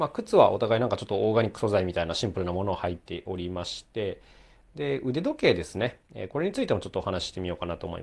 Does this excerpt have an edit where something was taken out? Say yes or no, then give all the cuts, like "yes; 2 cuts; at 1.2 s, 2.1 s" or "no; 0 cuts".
no; 0 cuts